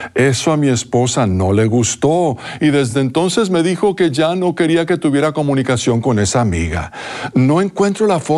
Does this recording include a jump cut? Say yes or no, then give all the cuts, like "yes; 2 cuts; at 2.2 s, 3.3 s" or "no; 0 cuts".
no; 0 cuts